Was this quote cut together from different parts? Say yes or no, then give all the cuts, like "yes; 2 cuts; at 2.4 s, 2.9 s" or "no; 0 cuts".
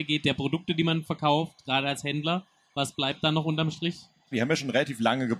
yes; 1 cut; at 4.3 s